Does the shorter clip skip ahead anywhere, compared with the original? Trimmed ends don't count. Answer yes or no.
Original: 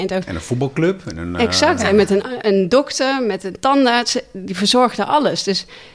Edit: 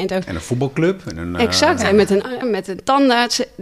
yes